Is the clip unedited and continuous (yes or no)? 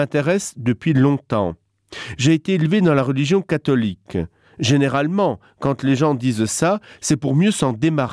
yes